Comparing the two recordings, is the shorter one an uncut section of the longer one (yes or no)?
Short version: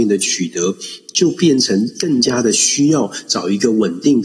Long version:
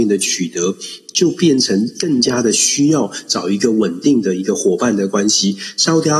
yes